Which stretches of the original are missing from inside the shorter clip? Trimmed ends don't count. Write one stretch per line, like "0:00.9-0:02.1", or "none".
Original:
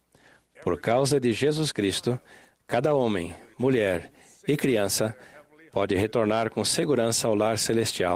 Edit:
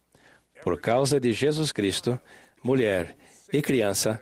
0:02.6-0:03.5

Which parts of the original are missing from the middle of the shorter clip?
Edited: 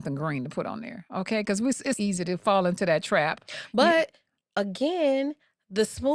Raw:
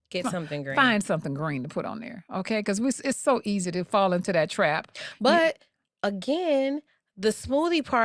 0:03.1-0:03.4

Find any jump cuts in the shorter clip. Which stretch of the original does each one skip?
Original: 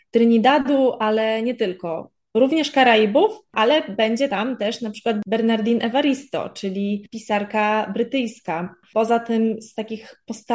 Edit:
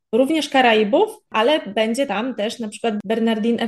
none

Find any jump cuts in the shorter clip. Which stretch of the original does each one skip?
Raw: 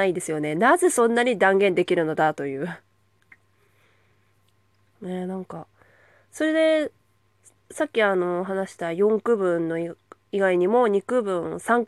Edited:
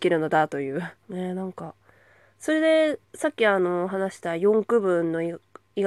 0:02.8-0:04.9
0:07.0-0:07.6

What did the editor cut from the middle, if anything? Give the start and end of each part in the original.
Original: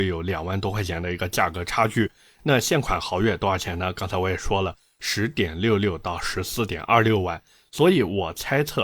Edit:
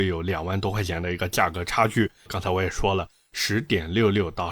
0:02.3-0:03.9

